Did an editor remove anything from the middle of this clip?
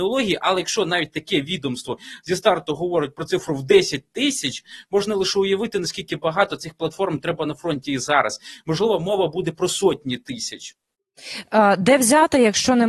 no; 0 cuts

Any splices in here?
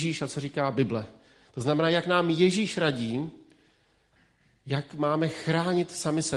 no; 0 cuts

